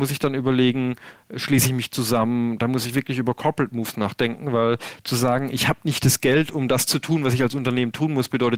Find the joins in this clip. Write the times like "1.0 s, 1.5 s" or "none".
none

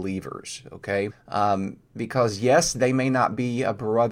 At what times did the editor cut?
1.1 s

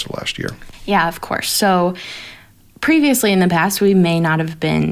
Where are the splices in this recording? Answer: none

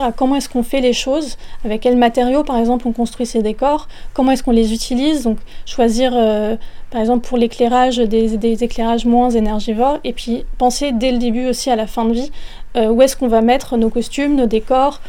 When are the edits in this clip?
none

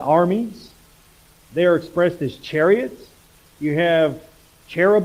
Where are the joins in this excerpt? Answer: none

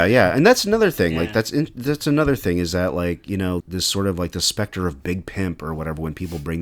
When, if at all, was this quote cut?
3.6 s

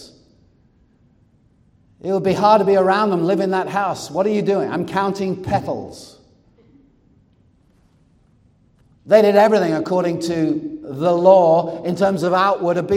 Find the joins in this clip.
8.9 s

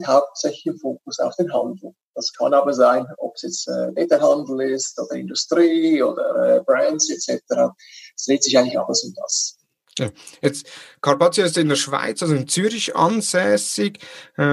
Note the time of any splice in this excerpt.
none

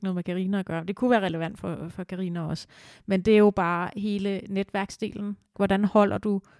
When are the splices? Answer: 5.5 s

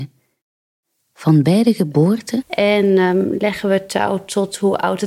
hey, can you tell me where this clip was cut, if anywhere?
2.4 s

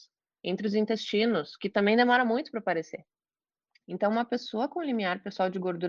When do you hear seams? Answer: none

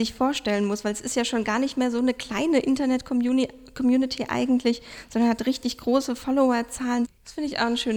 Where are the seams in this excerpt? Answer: 7.1 s

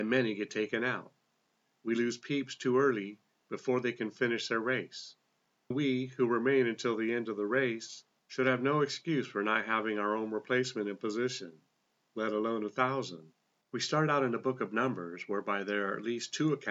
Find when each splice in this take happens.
5.7 s, 13.6 s

